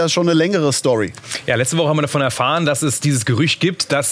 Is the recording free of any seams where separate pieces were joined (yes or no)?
yes